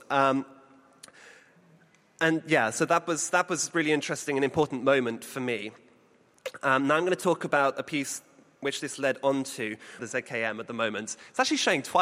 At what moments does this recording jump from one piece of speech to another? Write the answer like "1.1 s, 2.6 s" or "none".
10.0 s